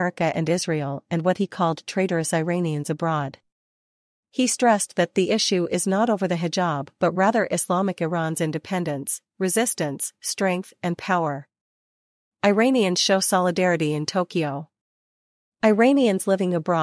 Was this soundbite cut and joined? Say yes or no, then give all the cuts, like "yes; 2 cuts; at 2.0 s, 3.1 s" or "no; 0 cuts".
no; 0 cuts